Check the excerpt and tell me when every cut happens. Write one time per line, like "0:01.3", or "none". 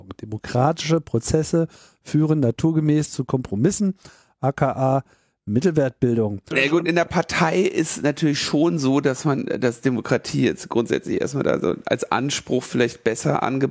0:06.5

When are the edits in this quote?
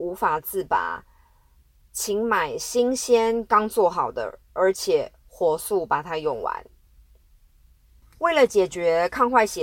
none

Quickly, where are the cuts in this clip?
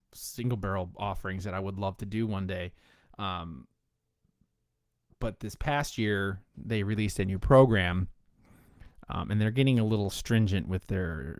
0:10.1

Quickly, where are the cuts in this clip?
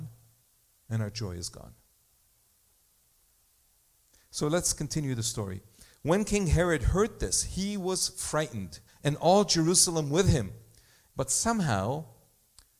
0:08.9
0:11.1

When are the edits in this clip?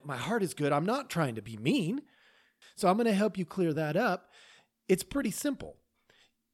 0:02.6

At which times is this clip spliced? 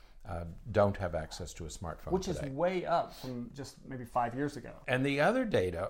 0:04.8

